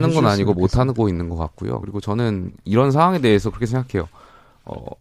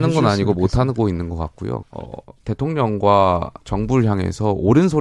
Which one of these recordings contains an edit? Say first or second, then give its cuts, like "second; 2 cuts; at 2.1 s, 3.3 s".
second; 2 cuts; at 1.8 s, 3.6 s